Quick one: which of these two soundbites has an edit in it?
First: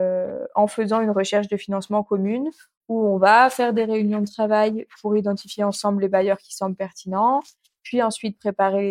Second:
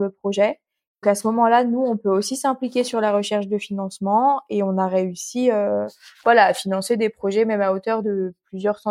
second; 1 cut; at 1.0 s

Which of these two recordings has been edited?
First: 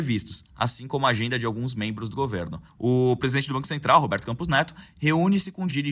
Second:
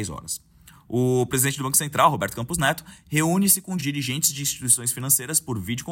first; 1 cut; at 2.7 s

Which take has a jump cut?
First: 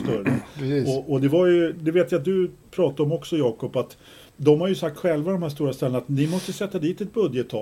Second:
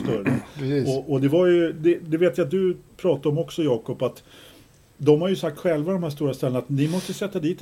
first; 2 cuts; at 1.7 s, 4.3 s

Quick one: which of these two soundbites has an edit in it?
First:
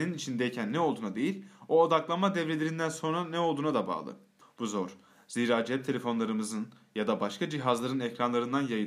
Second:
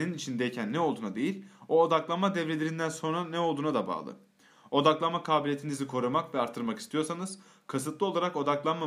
first; 1 cut; at 4.4 s

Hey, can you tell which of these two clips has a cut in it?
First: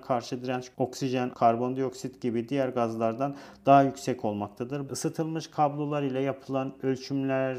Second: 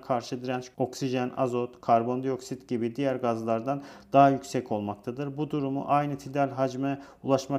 first; 2 cuts; at 1.3 s, 4.9 s

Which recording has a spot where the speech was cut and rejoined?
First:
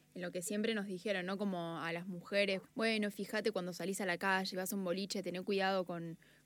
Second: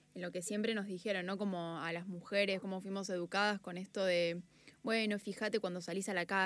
first; 2 cuts; at 2.6 s, 4.5 s

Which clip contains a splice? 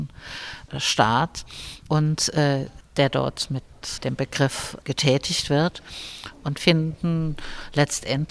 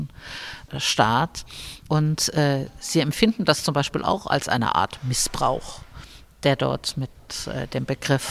first; 2 cuts; at 2.8 s, 4.0 s

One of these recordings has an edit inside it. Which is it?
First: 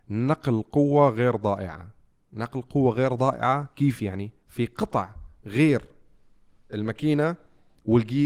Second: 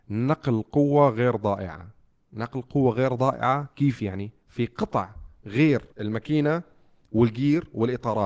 second; 1 cut; at 5.9 s

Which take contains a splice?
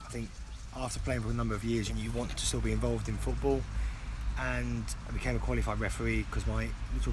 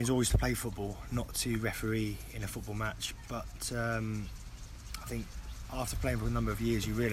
first; 1 cut; at 1.9 s

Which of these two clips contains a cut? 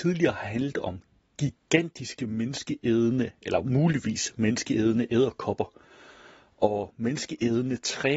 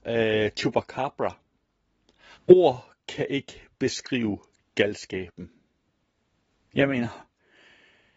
second; 1 cut; at 2.3 s

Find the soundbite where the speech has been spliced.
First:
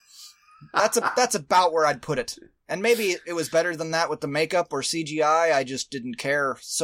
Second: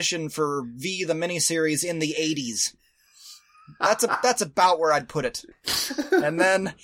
second; 1 cut; at 5.5 s

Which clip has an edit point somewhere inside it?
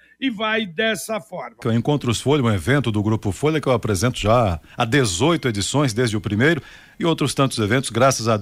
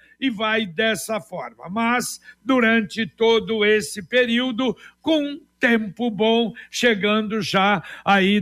first; 1 cut; at 1.6 s

